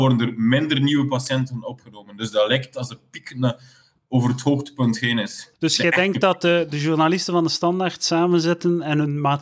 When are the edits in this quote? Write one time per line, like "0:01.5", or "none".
0:05.6